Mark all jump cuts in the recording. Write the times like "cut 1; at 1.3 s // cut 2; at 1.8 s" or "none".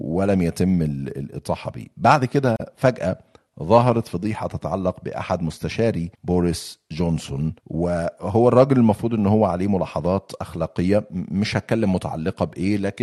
cut 1; at 6.1 s // cut 2; at 7.6 s